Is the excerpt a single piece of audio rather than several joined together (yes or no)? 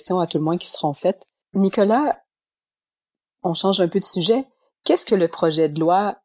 no